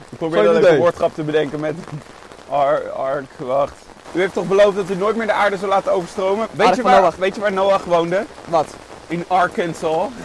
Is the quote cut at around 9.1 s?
no; 2 cuts; at 4.0 s, 6.5 s

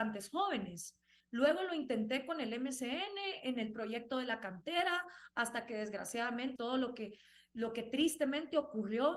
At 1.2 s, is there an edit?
yes; 2 cuts; at 1.2 s, 6.6 s

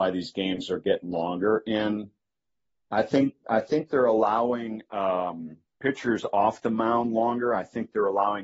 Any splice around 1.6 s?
no; 1 cut; at 5.7 s

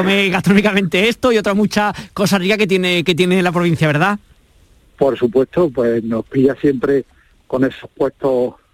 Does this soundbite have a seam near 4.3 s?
no; 0 cuts

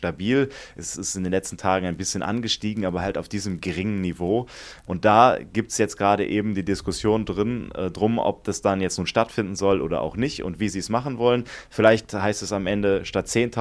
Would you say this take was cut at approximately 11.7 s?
no; 1 cut; at 4.8 s

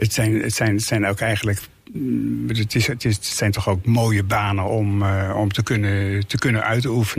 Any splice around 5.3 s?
yes; 1 cut; at 5.3 s

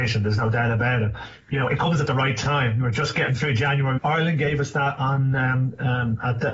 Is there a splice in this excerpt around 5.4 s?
no; 1 cut; at 4.0 s

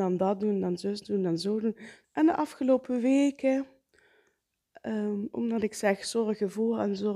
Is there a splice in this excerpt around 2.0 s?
yes; 1 cut; at 2.0 s

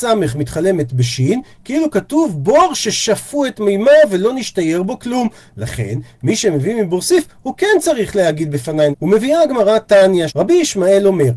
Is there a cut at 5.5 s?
no; 2 cuts; at 8.9 s, 10.3 s

